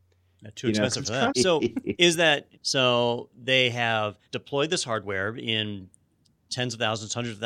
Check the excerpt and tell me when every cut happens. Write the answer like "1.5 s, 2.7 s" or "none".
1.3 s, 2.5 s, 4.2 s